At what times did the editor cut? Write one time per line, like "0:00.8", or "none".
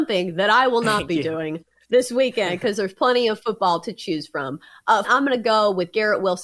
0:05.0